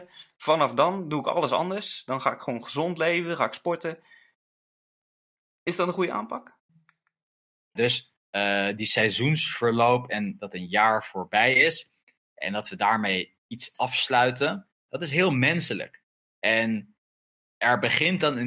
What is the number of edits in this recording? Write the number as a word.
one